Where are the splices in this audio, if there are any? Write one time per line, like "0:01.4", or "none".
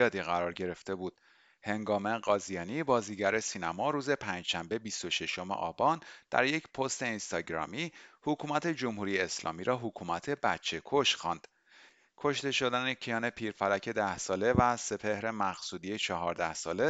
none